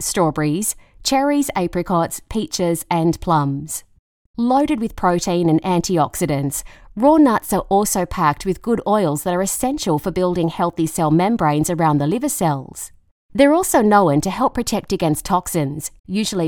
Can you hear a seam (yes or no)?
yes